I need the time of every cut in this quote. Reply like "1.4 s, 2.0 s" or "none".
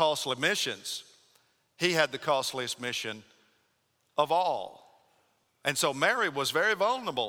none